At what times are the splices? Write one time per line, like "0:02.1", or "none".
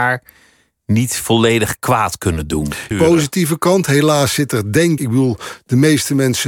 0:02.9
0:05.0

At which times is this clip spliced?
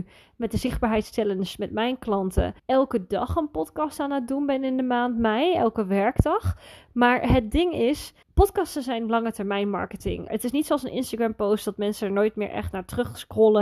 0:02.6
0:08.2
0:10.3

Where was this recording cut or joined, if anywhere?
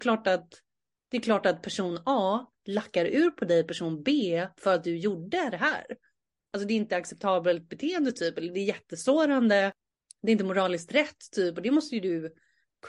none

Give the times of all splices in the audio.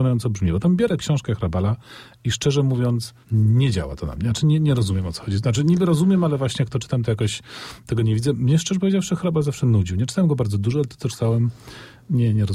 0:03.2

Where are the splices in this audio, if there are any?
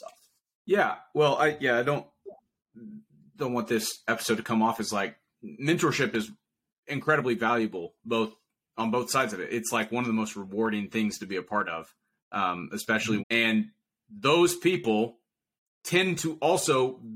0:13.2

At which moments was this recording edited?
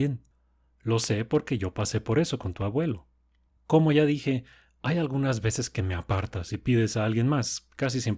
0:03.5

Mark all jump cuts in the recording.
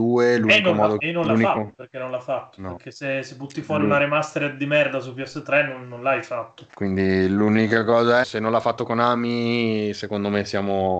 0:01.0
0:06.7
0:08.2

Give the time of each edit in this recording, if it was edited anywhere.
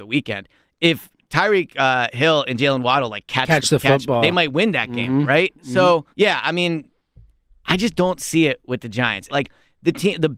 0:06.1
0:09.3

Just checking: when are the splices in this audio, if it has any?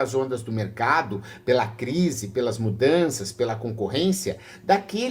none

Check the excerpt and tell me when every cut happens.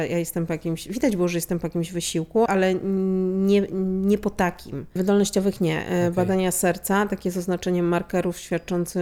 0:02.5
0:05.0

